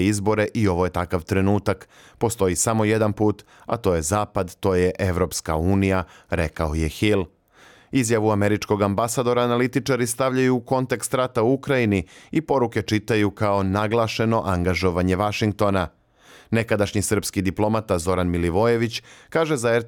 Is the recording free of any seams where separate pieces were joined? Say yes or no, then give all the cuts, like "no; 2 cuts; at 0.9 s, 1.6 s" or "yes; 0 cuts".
yes; 0 cuts